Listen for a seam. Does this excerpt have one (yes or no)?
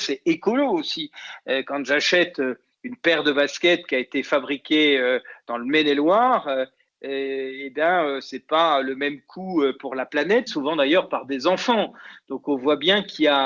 yes